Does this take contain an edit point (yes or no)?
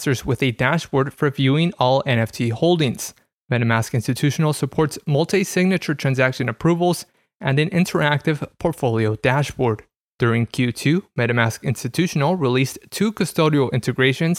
yes